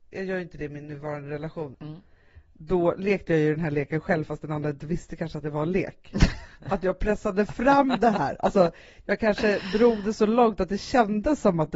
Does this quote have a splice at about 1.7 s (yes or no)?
yes